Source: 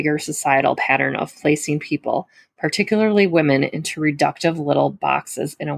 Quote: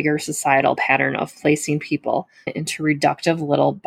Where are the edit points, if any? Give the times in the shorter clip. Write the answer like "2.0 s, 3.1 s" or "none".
2.5 s

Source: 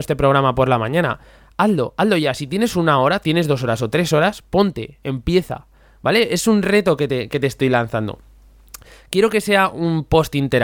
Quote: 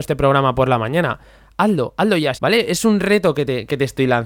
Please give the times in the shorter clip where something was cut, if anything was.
2.3 s

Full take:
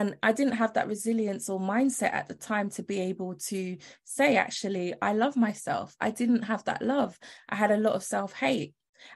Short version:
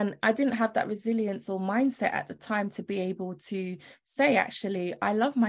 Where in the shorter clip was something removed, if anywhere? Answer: none

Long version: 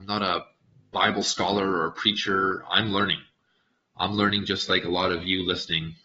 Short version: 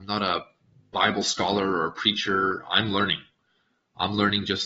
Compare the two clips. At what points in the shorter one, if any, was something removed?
none

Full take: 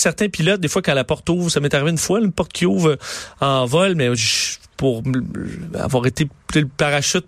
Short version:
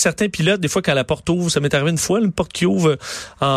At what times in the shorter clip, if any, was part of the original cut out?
none

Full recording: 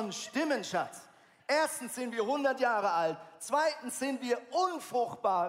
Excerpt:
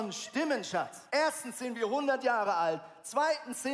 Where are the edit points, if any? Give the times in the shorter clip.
1.1 s

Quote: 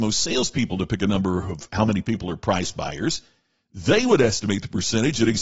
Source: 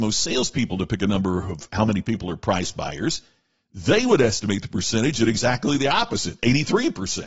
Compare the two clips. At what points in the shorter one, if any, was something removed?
none

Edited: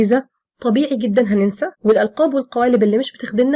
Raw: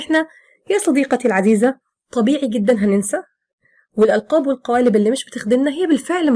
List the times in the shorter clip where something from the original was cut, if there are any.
1.7 s

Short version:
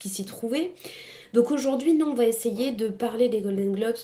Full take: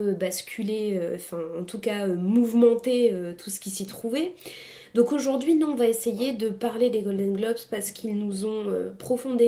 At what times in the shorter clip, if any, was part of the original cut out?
none

